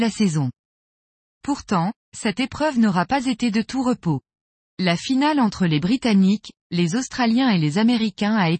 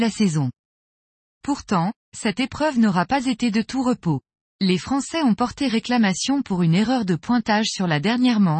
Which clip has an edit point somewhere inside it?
second; 1 cut; at 4.5 s

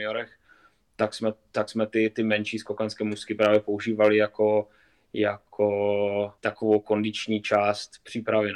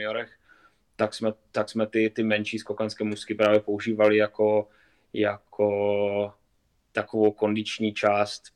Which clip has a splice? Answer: first; 1 cut; at 6.4 s

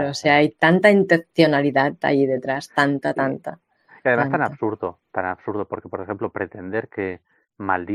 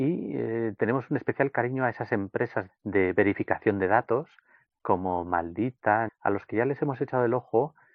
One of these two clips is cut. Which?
second; 2 cuts; at 2.7 s, 6.1 s

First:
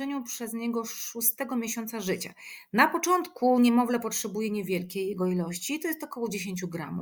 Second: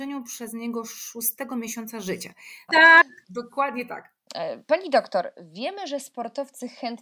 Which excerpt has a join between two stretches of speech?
second; 1 cut; at 2.7 s

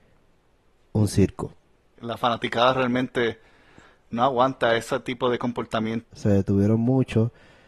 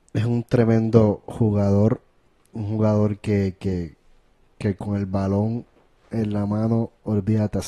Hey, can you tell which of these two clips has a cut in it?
first; 2 cuts; at 2.0 s, 6.0 s

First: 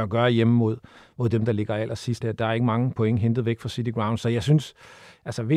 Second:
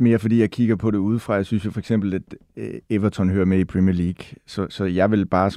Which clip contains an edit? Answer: first; 1 cut; at 2.2 s

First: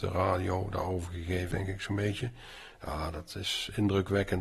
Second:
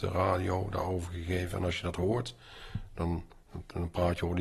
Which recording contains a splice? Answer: first; 1 cut; at 1.5 s

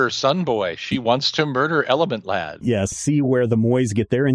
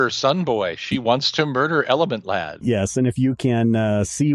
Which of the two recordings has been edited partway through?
first; 1 cut; at 2.9 s

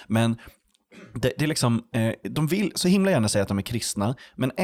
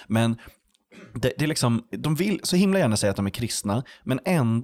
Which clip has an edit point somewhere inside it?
second; 1 cut; at 1.9 s

